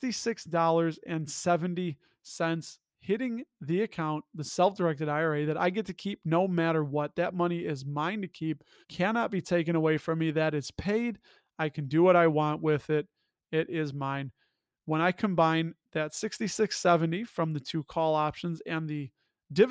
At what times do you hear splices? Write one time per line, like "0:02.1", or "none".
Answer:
0:08.8